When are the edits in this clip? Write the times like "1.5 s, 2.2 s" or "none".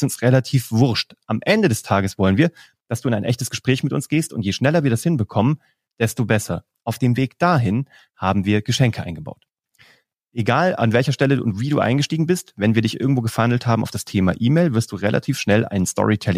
none